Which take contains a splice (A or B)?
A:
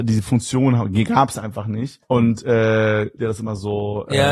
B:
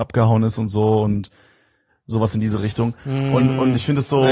A